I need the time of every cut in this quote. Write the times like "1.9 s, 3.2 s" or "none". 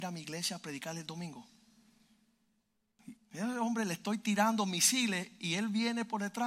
3.1 s